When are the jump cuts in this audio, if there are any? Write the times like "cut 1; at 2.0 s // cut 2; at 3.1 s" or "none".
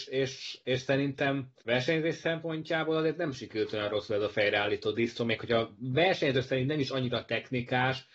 cut 1; at 1.6 s